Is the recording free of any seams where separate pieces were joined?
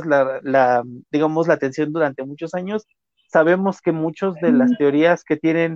yes; 0 cuts

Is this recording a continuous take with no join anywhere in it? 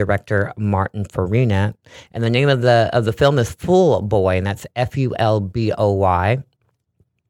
yes; 0 cuts

